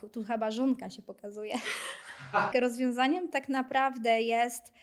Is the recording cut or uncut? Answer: cut